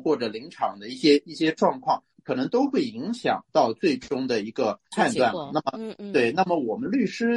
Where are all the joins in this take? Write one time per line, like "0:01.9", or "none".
none

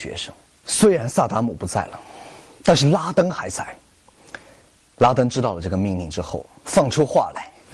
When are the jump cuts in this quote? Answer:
none

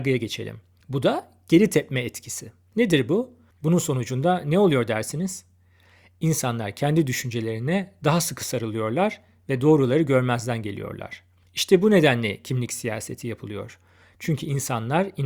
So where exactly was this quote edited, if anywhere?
0:03.5
0:11.4

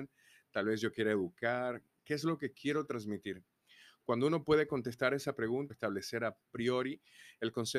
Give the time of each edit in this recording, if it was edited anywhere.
0:05.7

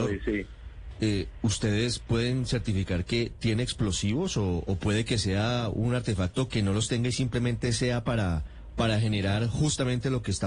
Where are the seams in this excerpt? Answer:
none

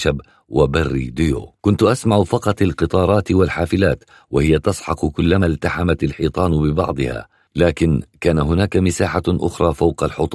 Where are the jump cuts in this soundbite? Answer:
0:01.6

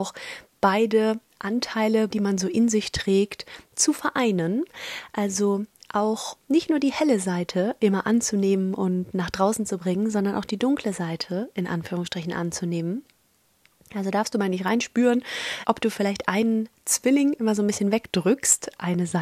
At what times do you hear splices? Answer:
0:02.1
0:15.6

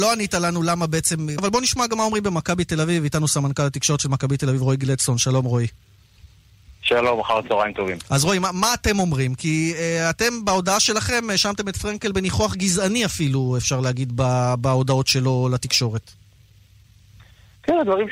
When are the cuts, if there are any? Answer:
0:01.4

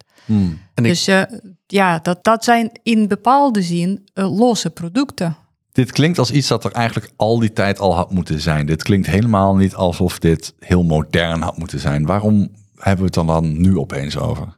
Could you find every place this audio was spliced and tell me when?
0:02.2
0:05.6

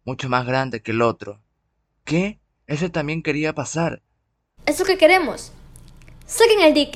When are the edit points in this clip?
0:02.5
0:04.6

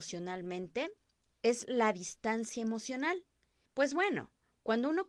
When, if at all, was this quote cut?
0:03.7

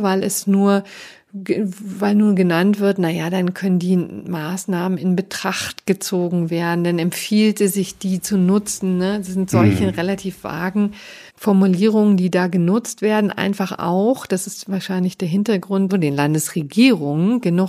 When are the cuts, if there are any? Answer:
0:11.3
0:15.9

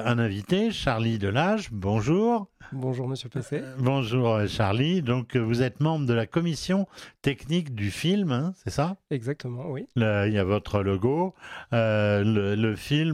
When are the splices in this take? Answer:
none

